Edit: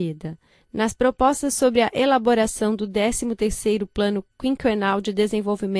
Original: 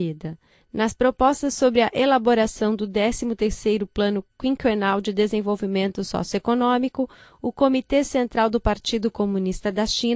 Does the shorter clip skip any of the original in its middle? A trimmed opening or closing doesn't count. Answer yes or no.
no